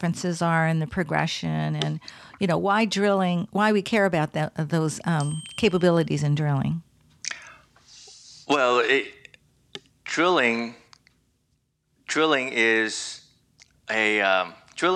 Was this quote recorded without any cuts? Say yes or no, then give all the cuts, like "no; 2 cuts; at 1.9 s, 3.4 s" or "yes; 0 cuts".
yes; 0 cuts